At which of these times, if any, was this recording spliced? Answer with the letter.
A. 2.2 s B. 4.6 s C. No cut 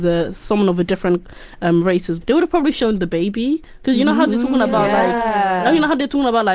A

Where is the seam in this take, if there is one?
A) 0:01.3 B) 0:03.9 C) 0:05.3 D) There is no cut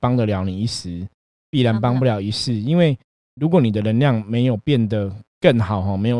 C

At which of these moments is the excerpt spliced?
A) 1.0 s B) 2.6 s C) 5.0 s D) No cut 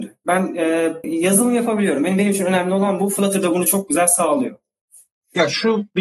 A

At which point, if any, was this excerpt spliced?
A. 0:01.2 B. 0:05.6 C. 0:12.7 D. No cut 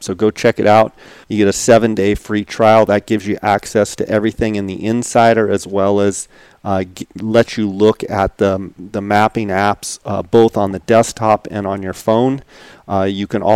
A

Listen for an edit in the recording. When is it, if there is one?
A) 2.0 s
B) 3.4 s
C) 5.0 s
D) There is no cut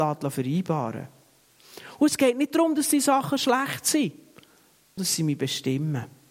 C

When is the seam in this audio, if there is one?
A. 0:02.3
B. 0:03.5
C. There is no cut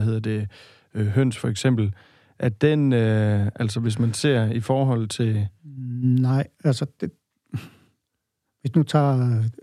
B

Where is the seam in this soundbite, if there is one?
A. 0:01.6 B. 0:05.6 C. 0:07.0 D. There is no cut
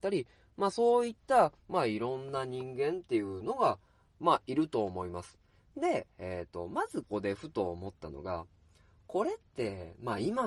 C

